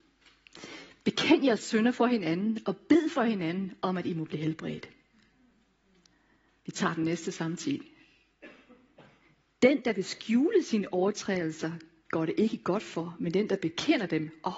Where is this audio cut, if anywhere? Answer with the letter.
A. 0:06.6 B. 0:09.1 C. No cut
C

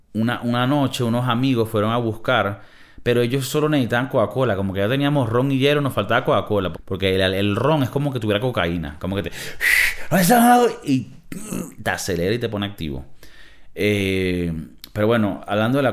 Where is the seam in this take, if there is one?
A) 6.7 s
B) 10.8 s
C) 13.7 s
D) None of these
A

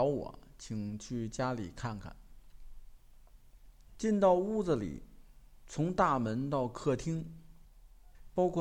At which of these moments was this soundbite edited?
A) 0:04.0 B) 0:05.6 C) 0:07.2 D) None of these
A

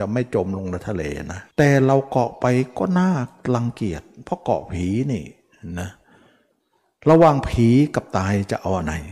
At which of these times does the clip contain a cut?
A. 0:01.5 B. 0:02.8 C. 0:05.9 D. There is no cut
A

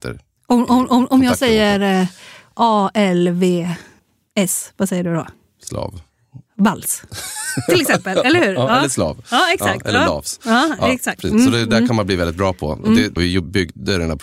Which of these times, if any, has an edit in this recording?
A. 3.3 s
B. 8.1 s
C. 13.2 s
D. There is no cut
C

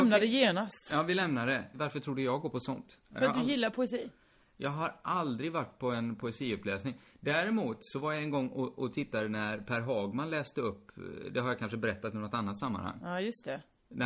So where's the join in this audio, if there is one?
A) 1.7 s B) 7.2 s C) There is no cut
A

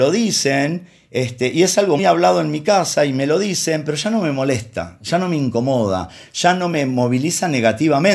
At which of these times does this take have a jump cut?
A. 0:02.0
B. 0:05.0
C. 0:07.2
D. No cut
A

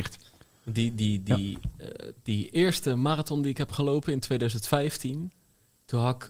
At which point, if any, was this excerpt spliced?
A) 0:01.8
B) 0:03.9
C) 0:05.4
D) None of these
D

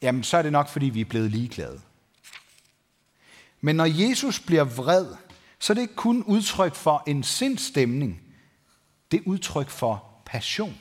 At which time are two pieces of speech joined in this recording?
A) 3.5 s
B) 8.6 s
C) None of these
C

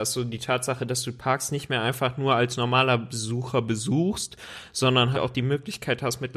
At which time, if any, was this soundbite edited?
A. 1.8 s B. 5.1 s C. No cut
B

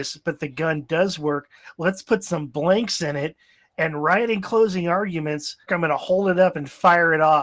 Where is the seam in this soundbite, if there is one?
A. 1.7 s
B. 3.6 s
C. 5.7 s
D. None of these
C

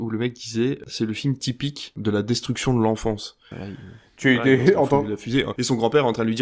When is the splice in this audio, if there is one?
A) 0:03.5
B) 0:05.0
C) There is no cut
A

